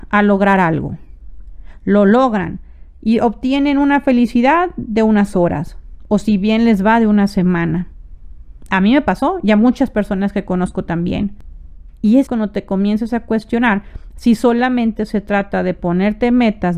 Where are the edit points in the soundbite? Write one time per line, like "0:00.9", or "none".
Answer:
0:12.3